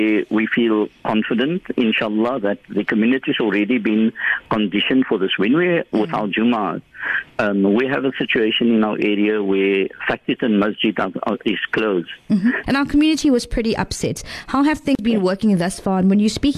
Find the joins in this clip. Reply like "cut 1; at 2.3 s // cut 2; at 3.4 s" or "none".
cut 1; at 12.6 s

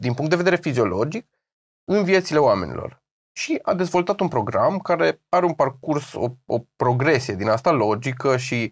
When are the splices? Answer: none

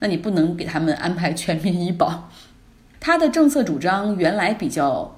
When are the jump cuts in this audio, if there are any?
cut 1; at 2.9 s

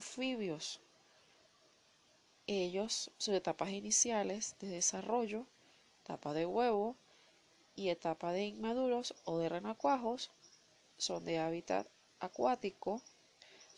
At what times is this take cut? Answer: none

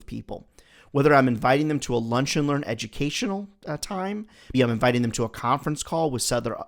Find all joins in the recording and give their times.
cut 1; at 4.5 s

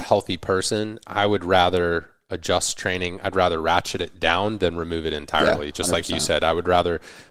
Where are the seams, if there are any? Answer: none

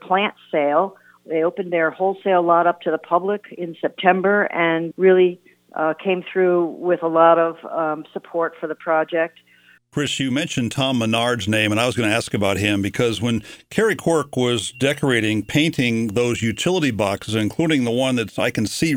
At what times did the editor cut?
cut 1; at 4.9 s // cut 2; at 9.8 s

